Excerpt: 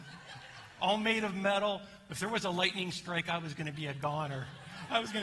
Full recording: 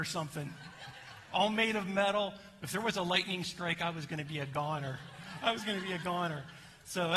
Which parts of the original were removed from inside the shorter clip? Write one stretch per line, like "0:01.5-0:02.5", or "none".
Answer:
none